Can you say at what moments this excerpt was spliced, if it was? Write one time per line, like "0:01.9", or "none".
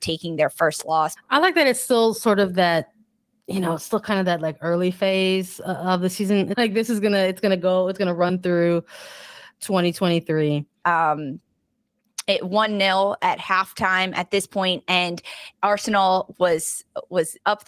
0:01.2
0:06.5
0:10.8